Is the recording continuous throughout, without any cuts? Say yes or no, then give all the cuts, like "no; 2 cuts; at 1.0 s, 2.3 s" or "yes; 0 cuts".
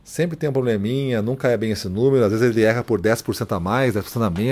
yes; 0 cuts